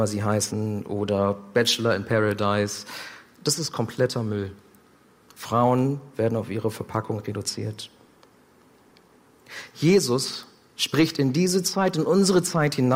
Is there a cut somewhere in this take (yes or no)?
no